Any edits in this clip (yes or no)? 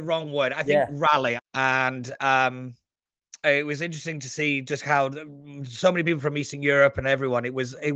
yes